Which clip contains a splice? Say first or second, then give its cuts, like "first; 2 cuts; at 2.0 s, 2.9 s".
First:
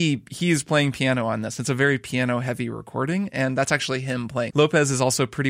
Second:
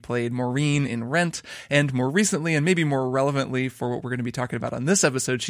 first; 1 cut; at 4.5 s